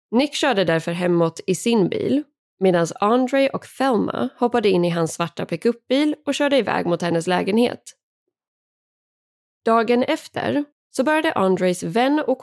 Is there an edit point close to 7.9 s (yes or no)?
no